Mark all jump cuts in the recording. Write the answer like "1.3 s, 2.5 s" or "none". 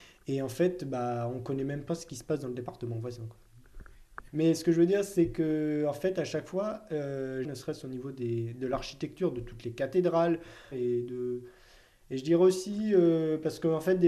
4.3 s, 7.4 s, 10.7 s

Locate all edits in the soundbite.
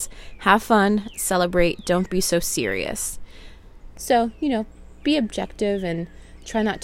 3.9 s, 5.0 s

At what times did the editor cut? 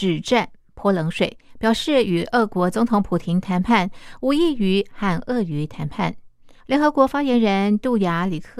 6.6 s

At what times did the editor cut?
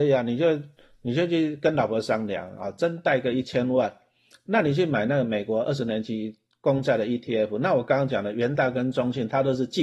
none

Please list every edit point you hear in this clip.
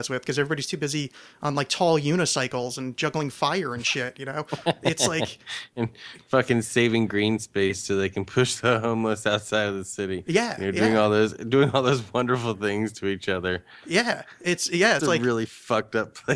15.0 s

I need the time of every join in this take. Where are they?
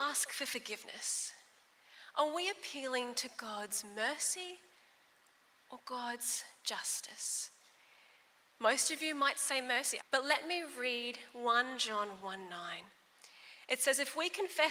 10.0 s

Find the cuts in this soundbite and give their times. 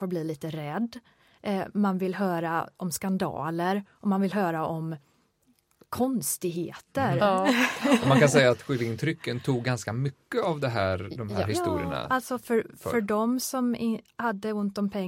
none

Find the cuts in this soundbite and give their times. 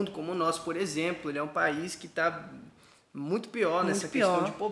none

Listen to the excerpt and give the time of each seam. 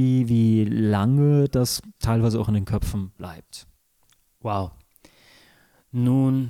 none

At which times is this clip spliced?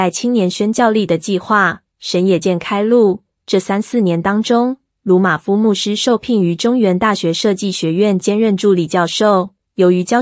2.4 s

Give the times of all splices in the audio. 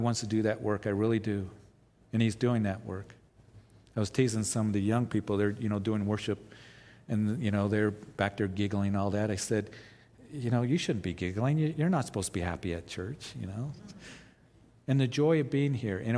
14.7 s

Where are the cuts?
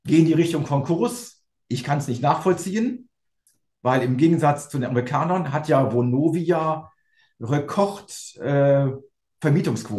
none

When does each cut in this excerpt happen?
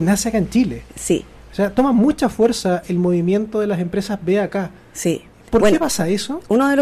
none

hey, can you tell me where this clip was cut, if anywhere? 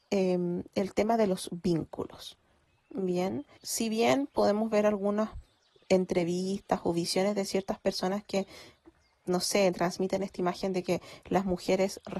3.6 s

